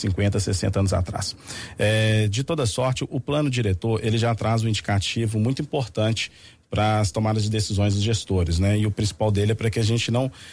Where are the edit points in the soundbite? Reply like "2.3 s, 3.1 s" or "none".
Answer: none

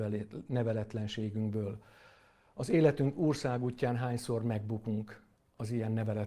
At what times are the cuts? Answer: none

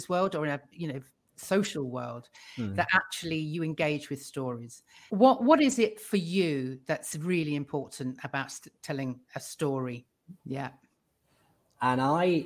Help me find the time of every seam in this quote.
5.1 s, 10.4 s

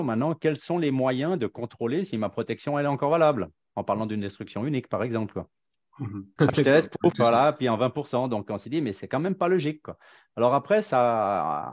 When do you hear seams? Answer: 6.4 s

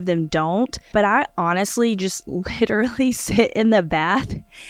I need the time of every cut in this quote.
0.9 s

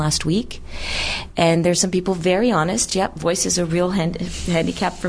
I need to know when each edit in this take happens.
none

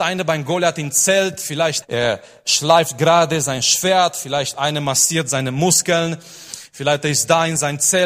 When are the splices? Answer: 1.8 s

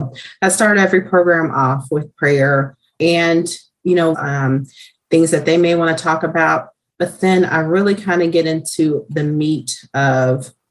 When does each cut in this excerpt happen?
4.1 s

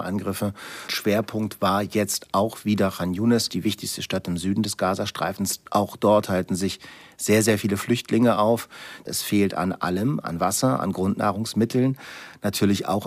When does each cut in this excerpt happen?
none

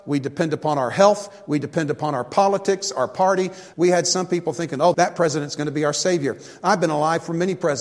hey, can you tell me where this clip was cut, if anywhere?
3.7 s, 4.9 s

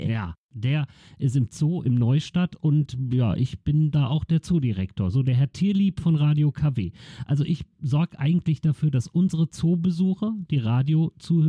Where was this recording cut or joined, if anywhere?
none

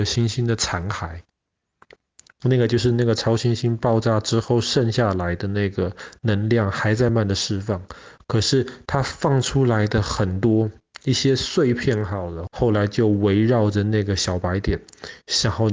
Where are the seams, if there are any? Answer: 2.4 s, 7.1 s, 12.5 s

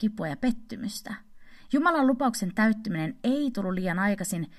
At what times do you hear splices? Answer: 1.7 s

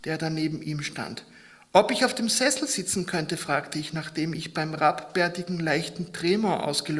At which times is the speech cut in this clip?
none

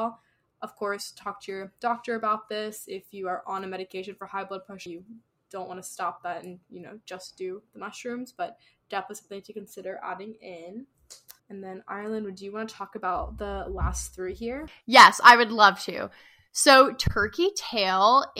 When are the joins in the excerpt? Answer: 4.9 s, 11.4 s

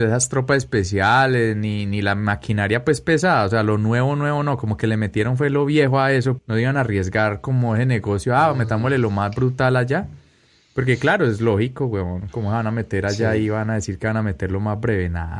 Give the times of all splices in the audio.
6.4 s

